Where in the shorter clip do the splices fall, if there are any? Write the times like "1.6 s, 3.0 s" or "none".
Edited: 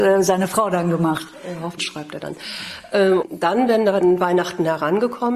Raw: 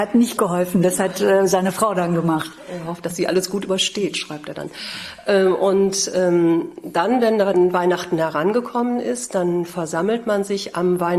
1.8 s, 3.2 s